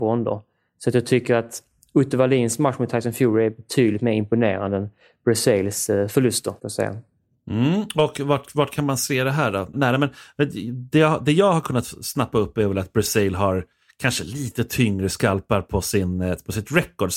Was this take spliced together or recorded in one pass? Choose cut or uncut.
cut